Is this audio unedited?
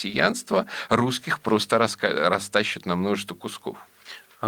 yes; 0 cuts

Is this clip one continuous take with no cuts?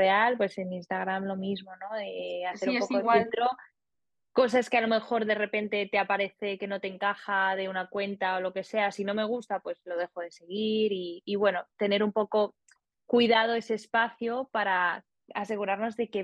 yes; 0 cuts

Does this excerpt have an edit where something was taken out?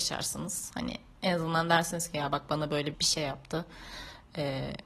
yes; 1 cut; at 2.9 s

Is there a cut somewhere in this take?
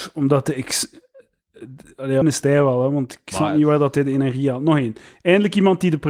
yes; 1 cut; at 2.2 s

